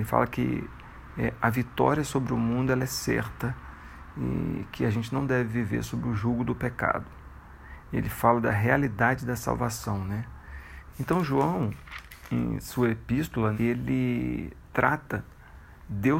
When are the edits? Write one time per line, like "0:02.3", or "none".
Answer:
0:10.9
0:13.5